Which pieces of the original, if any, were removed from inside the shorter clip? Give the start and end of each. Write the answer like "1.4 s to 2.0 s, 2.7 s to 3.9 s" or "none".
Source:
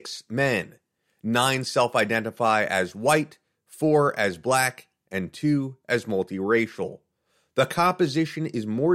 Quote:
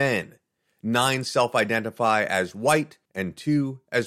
3.5 s to 5.0 s